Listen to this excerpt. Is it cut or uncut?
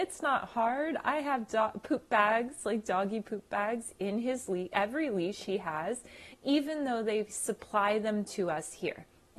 uncut